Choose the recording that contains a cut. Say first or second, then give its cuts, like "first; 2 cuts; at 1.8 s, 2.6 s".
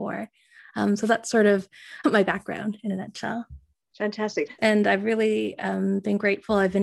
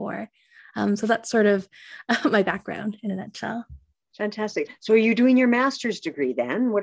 first; 2 cuts; at 2.0 s, 4.6 s